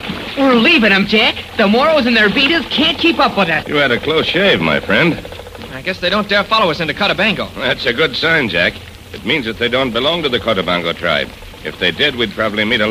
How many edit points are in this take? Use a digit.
2